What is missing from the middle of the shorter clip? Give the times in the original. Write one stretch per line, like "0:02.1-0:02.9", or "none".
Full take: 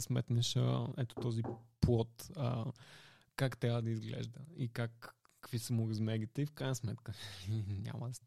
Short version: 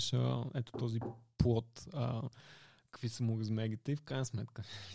0:03.3-0:05.4